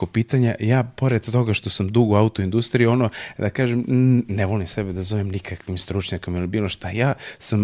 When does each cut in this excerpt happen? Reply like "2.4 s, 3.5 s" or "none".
none